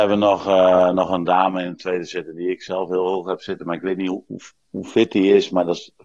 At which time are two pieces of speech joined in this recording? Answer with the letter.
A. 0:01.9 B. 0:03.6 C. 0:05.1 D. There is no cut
D